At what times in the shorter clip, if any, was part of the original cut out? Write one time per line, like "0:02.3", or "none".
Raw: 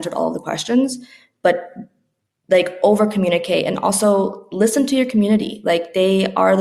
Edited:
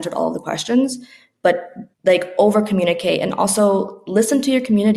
0:01.9